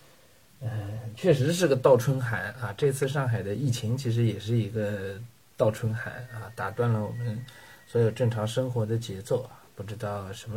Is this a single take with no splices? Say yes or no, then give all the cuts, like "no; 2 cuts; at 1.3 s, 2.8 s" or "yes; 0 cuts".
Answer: yes; 0 cuts